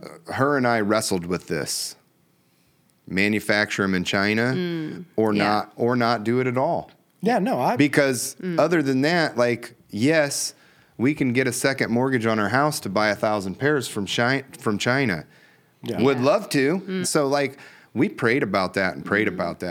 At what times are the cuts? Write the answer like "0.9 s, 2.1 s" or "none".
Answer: 15.8 s, 17.0 s